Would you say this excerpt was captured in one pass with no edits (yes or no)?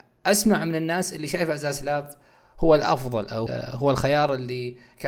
no